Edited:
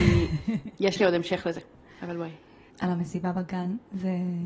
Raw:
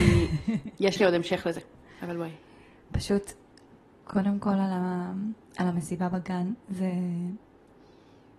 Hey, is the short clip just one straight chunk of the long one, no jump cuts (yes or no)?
no